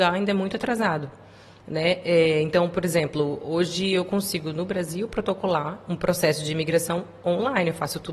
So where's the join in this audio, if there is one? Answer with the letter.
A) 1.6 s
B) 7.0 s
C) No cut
C